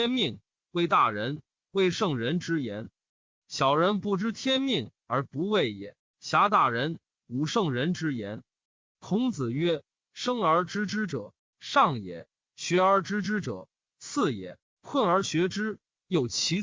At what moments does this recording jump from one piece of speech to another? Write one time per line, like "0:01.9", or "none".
none